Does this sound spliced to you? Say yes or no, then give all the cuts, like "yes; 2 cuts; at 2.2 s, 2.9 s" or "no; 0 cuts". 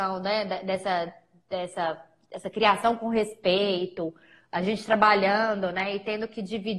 no; 0 cuts